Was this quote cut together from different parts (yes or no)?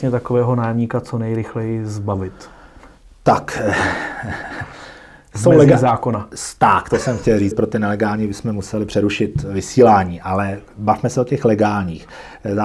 yes